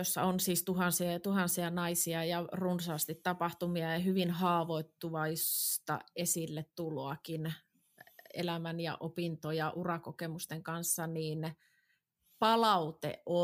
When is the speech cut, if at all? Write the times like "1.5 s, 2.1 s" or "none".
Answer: none